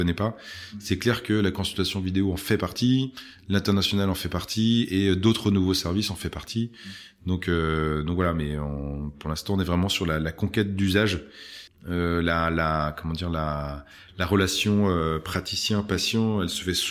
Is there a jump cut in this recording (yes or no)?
yes